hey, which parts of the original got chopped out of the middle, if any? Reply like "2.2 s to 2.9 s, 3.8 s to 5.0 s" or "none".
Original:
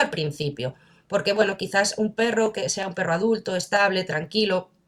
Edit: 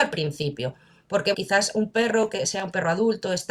1.3 s to 1.6 s